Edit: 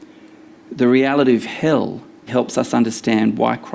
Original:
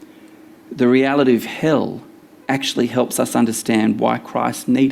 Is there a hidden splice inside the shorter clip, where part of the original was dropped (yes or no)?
yes